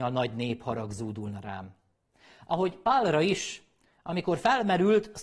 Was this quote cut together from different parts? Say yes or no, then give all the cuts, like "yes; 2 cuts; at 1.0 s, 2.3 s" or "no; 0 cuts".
no; 0 cuts